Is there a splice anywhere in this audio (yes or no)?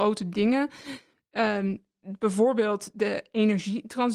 no